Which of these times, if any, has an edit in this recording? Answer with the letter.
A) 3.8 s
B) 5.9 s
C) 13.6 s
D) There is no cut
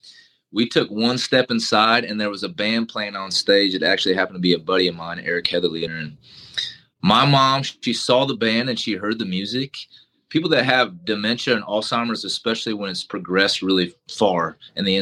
B